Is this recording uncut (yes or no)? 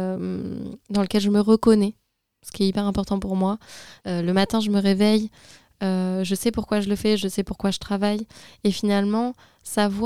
no